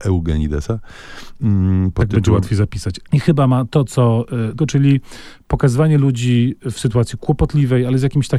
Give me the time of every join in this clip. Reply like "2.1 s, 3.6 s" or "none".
3.1 s, 4.6 s

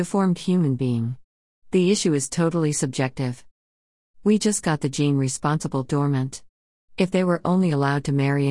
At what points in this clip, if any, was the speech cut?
6.8 s

